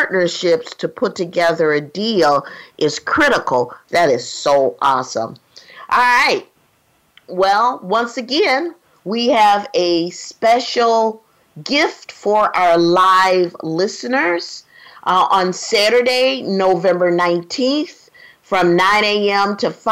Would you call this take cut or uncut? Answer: cut